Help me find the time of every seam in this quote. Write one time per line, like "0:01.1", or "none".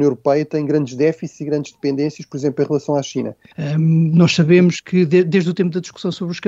0:03.5